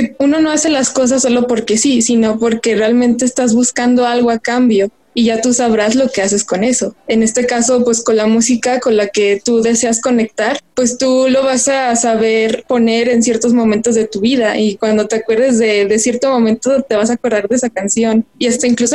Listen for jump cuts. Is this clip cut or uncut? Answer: uncut